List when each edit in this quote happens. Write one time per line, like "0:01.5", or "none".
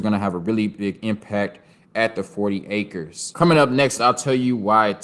0:04.0